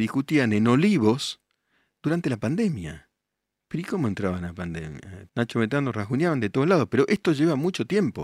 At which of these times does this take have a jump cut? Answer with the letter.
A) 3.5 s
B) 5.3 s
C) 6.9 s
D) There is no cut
B